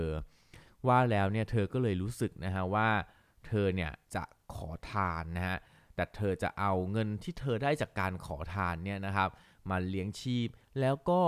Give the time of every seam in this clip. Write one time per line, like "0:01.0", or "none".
0:04.0